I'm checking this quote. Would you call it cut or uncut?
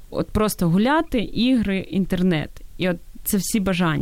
uncut